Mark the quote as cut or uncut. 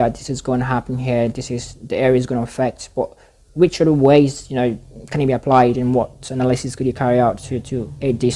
uncut